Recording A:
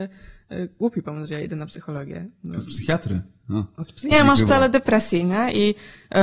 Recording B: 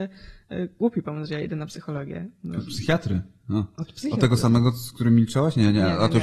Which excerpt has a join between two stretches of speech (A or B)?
A